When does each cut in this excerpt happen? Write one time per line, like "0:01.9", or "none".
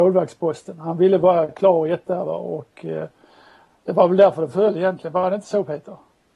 none